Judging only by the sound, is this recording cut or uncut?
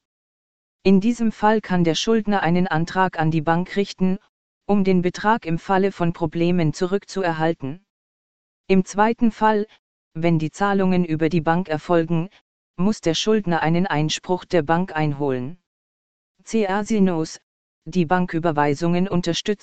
cut